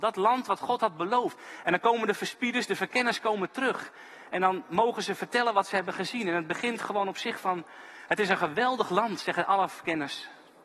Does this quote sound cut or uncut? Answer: cut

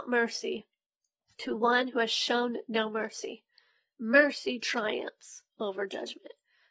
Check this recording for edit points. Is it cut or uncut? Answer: uncut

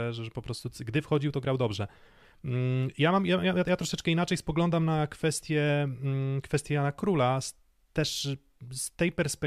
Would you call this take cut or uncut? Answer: uncut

